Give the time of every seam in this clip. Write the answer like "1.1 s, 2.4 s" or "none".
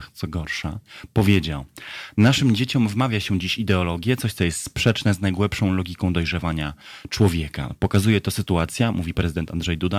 none